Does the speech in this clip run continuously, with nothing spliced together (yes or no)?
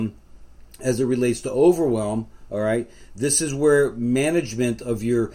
yes